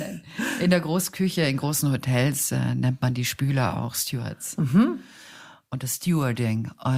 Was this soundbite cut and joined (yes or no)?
no